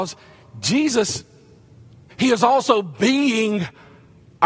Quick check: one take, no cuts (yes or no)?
no